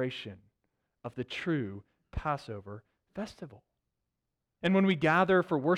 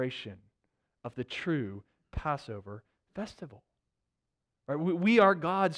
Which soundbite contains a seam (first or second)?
first